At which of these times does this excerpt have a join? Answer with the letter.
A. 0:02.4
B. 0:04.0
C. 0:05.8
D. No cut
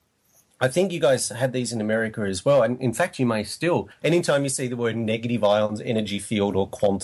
B